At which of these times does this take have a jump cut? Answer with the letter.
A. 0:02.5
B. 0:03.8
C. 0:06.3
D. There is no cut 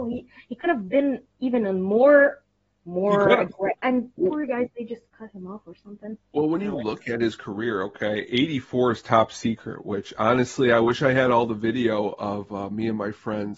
B